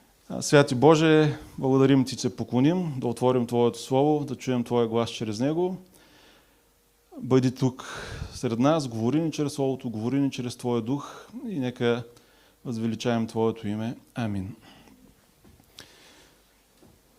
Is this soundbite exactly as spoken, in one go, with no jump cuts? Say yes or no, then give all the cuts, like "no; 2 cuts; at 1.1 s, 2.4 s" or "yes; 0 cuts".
no; 1 cut; at 2.2 s